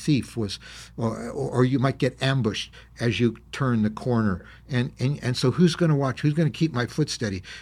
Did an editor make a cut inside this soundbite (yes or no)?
no